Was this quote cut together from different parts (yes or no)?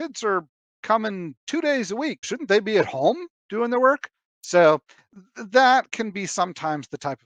yes